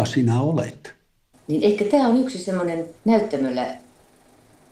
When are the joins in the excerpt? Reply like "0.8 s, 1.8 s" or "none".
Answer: 1.3 s, 3.0 s